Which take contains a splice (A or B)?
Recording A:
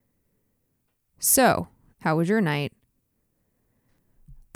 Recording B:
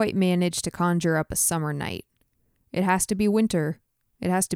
A